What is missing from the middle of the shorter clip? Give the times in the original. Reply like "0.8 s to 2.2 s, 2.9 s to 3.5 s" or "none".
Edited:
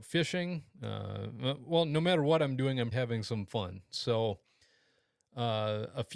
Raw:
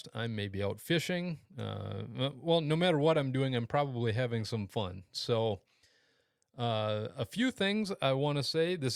3.7 s to 4.1 s